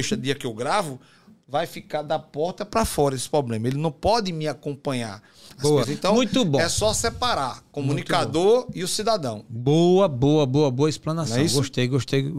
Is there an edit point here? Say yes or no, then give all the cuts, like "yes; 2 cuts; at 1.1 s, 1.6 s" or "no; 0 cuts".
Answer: yes; 1 cut; at 5.8 s